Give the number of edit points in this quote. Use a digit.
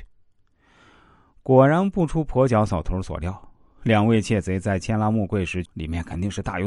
1